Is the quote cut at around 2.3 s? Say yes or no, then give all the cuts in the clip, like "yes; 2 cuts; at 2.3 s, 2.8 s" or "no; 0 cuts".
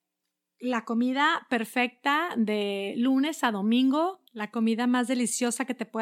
no; 1 cut; at 4.3 s